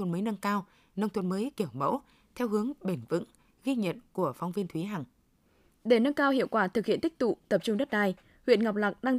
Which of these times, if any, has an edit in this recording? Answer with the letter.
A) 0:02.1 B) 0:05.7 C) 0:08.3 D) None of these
B